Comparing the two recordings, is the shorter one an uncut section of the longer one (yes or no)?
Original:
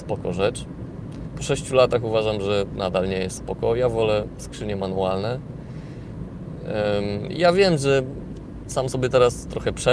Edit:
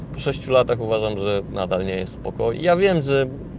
no